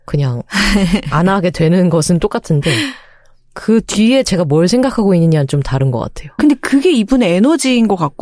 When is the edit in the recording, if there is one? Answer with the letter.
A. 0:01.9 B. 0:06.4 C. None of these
B